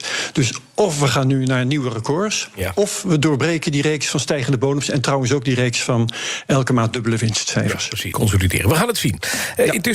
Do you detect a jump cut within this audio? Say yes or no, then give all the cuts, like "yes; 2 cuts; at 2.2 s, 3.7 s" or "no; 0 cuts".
yes; 1 cut; at 8.1 s